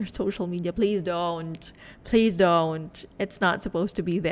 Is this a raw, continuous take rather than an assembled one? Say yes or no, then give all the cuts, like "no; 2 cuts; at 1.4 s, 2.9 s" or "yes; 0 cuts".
yes; 0 cuts